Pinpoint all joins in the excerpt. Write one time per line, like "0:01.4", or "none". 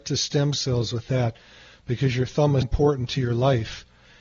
0:02.6